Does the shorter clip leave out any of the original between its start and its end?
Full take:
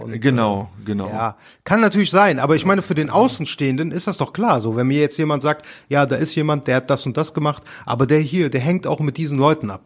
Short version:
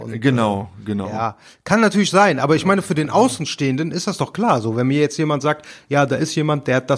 no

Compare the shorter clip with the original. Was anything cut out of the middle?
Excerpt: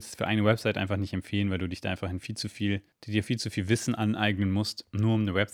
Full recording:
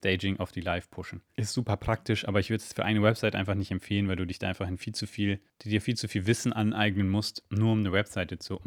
no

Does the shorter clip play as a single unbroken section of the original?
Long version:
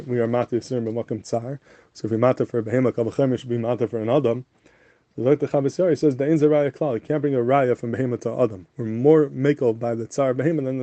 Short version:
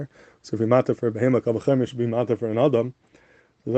yes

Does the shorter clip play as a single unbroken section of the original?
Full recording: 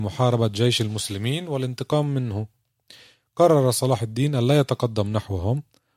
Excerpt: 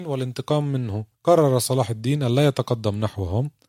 no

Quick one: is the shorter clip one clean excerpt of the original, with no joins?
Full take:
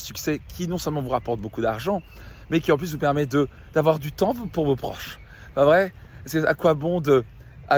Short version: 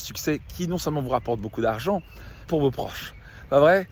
no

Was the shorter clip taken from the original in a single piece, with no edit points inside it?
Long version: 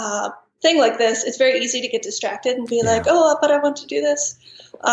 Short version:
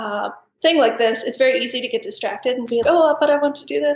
no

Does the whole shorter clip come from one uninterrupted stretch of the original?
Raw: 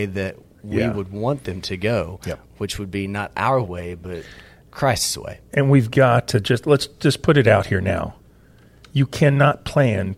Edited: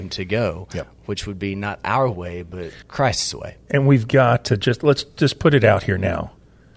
no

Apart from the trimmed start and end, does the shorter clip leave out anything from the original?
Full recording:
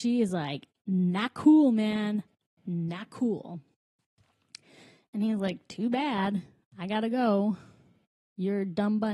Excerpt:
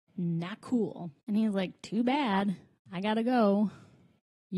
yes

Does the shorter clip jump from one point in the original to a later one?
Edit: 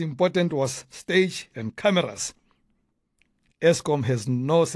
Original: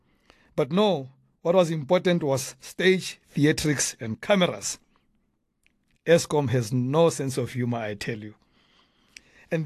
yes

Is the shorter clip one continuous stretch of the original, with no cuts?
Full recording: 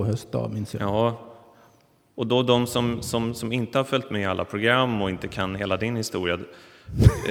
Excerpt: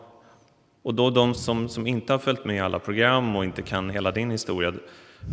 no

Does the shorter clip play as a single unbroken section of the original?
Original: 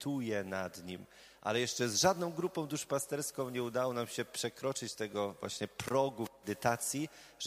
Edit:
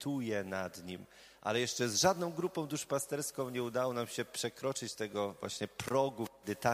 yes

